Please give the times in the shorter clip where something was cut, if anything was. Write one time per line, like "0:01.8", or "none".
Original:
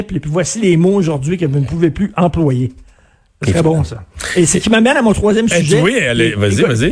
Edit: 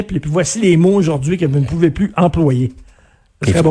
none